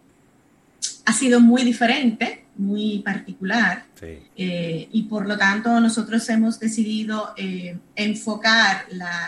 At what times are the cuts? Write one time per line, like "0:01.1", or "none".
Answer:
0:04.3